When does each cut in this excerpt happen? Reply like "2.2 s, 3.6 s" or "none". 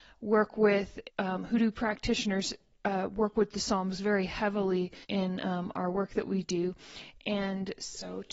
1.1 s, 5.0 s